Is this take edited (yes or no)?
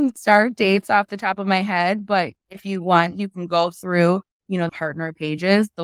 yes